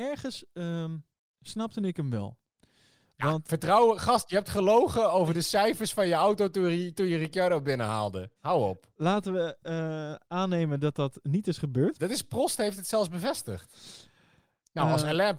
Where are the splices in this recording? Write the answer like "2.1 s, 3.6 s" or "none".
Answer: 8.4 s, 10.2 s, 12.0 s

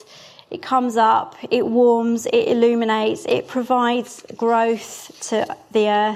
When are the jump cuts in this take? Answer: none

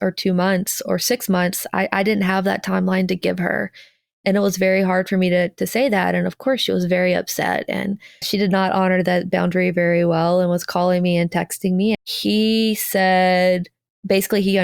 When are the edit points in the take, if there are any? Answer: 8.2 s, 11.9 s

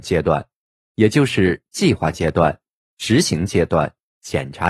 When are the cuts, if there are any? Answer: none

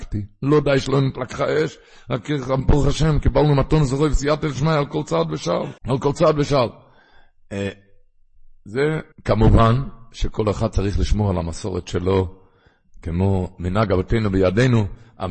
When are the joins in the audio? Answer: 5.8 s, 9.1 s

